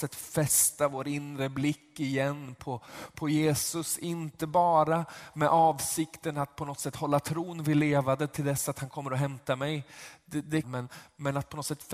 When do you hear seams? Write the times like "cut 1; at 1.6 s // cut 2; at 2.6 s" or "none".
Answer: cut 1; at 10.6 s

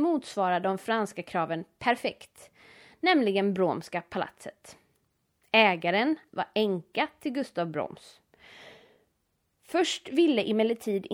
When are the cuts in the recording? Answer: cut 1; at 6.3 s

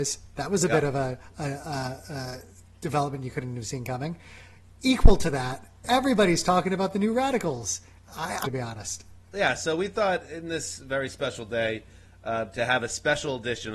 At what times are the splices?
cut 1; at 8.4 s

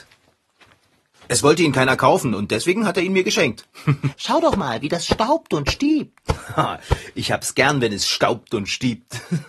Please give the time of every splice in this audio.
cut 1; at 4.1 s

